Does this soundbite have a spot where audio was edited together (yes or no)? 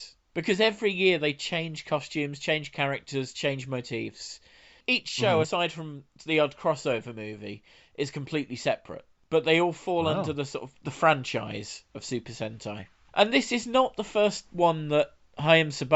no